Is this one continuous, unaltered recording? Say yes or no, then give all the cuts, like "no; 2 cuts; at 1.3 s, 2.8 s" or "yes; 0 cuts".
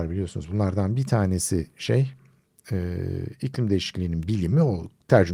yes; 0 cuts